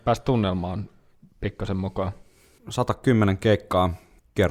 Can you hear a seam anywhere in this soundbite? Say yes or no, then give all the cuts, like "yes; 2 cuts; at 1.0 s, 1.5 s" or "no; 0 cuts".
yes; 1 cut; at 2.6 s